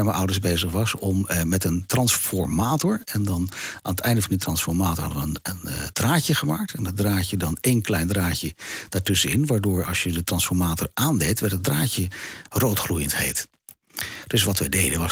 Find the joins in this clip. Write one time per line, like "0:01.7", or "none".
none